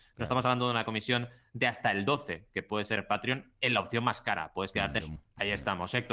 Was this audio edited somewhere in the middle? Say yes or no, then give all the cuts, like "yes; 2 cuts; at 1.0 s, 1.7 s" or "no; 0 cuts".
yes; 1 cut; at 5.0 s